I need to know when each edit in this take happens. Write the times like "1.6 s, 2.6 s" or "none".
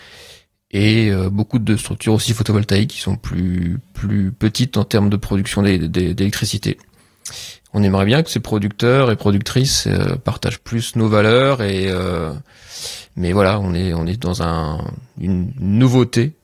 none